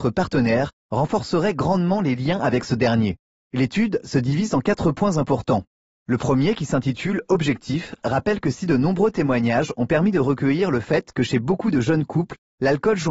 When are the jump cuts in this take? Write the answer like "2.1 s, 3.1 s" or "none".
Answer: 3.4 s

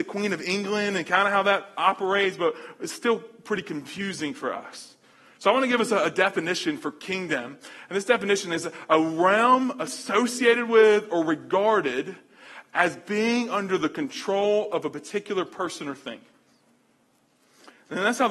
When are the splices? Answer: none

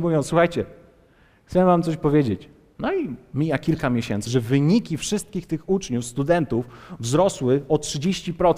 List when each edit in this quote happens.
2.8 s, 4.3 s

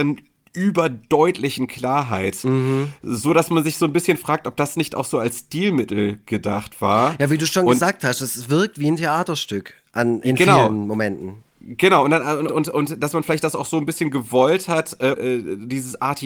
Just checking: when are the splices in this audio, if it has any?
12.5 s, 15.1 s

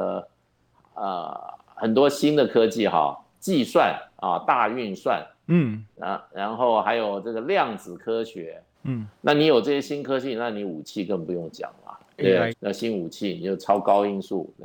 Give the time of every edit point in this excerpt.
8.7 s, 12.5 s

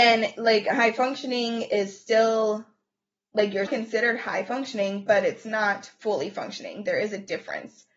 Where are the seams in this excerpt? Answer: 3.7 s

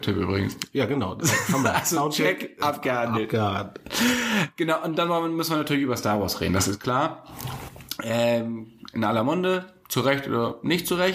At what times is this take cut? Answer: none

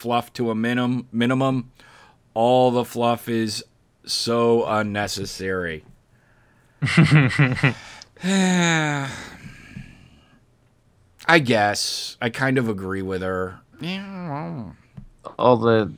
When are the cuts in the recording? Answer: 13.7 s

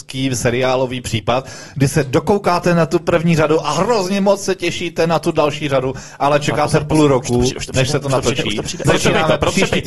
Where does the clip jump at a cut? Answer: 8.8 s

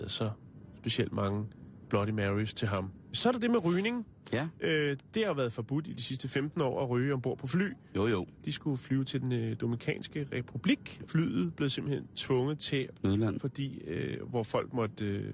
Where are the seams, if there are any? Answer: 8.3 s, 13.4 s

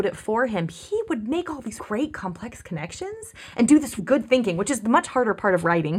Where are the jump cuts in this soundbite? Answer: 1.8 s, 4.0 s

